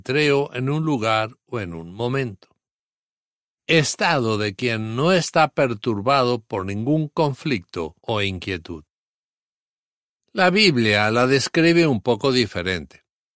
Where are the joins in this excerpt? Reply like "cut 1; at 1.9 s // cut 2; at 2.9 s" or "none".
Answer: cut 1; at 8.0 s